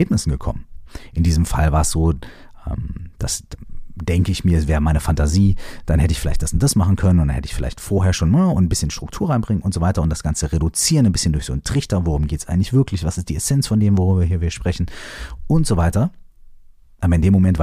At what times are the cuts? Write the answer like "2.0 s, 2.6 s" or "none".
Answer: none

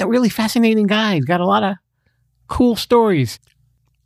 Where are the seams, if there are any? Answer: none

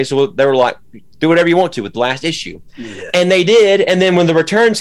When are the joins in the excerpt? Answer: none

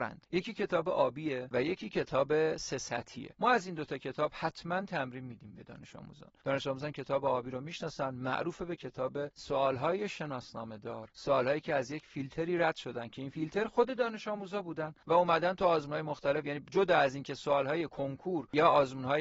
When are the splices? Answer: none

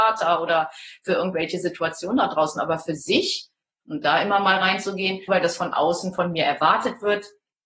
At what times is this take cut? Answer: 3.8 s, 5.3 s

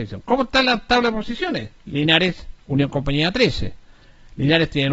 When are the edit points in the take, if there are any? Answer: 1.8 s

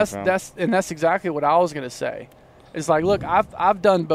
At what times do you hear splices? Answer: none

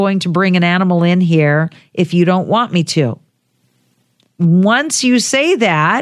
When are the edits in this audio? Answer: none

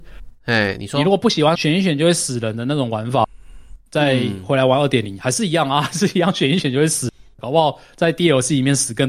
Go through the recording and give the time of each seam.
1.5 s

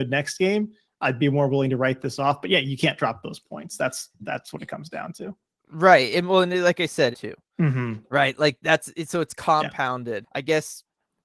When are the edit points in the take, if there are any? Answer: 7.1 s, 10.2 s

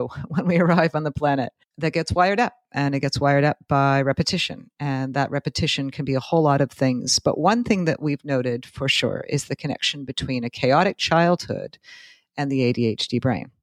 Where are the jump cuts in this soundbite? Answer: none

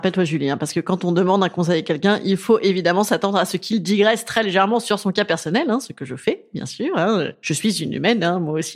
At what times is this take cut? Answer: none

